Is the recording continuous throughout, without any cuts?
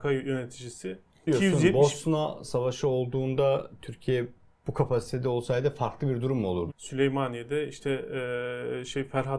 no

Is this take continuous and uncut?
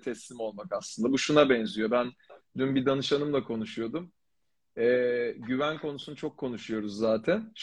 yes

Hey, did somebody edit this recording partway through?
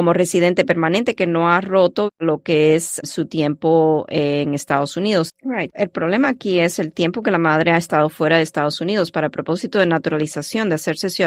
yes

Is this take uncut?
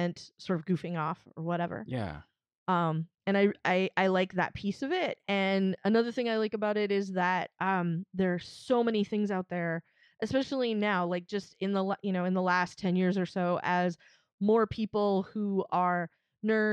yes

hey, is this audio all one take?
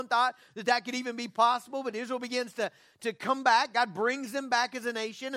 yes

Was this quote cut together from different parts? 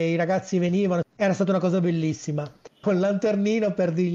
yes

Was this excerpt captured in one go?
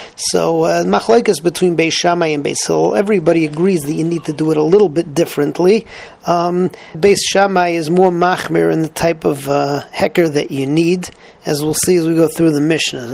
no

